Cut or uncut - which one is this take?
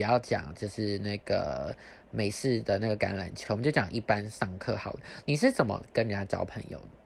uncut